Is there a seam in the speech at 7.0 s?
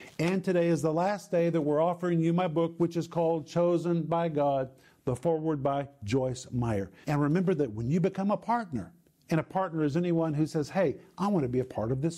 yes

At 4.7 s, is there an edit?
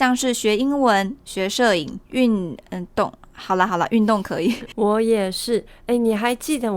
yes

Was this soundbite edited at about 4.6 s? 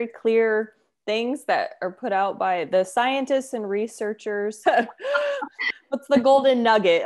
yes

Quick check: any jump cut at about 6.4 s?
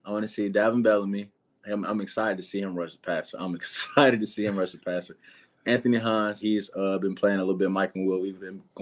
yes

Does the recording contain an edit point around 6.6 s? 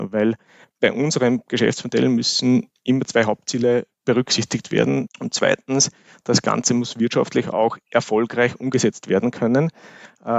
no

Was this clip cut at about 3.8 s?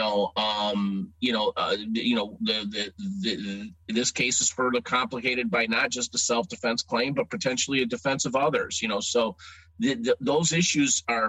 yes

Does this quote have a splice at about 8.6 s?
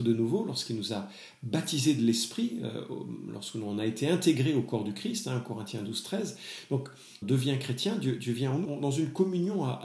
yes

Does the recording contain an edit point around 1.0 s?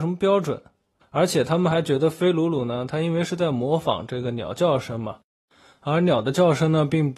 yes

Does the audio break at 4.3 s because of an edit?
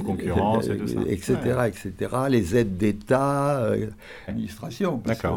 yes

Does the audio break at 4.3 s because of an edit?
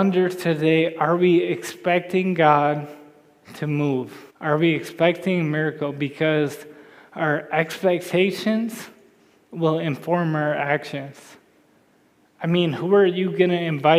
yes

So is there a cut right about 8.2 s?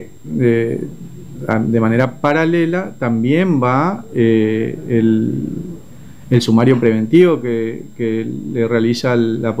no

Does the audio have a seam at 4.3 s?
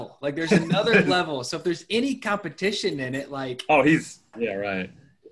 yes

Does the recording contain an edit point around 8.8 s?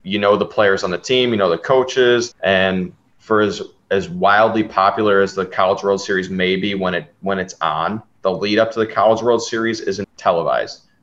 no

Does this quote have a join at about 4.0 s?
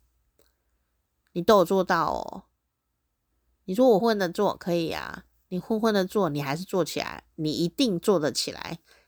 yes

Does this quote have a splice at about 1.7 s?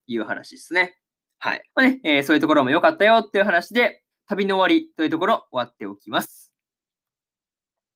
yes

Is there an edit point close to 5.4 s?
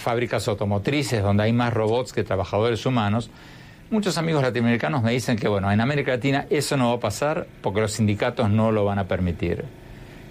no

